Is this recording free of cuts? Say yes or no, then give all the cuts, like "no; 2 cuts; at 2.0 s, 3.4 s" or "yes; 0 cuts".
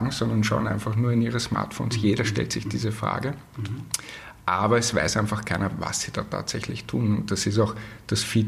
yes; 0 cuts